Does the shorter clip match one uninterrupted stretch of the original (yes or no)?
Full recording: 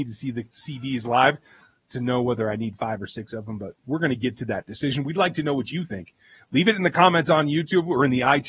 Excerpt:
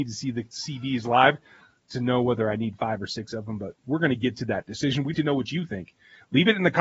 no